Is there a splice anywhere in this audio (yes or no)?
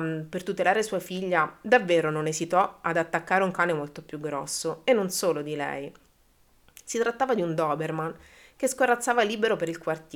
no